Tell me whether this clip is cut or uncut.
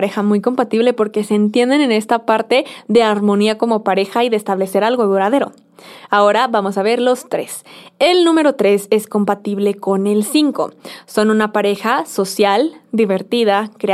uncut